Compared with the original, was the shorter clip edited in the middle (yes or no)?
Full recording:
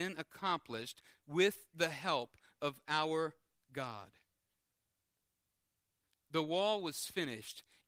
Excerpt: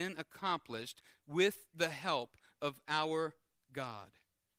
no